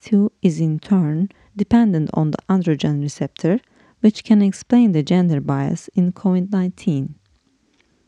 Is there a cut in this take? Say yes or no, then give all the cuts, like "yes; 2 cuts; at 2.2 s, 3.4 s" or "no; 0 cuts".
no; 0 cuts